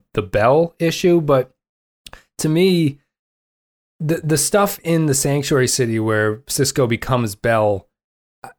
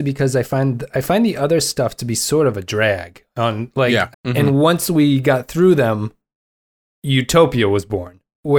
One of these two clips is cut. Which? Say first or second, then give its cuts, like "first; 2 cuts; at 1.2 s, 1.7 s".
second; 1 cut; at 4.1 s